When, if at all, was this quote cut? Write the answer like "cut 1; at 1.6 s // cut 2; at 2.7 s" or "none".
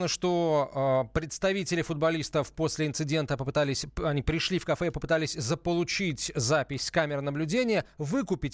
none